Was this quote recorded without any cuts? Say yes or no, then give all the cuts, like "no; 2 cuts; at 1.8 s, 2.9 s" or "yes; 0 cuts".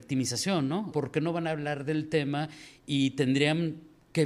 no; 1 cut; at 0.9 s